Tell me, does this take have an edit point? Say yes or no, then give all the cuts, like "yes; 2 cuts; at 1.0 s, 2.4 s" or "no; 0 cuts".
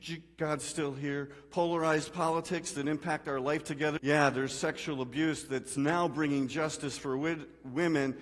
yes; 1 cut; at 4.0 s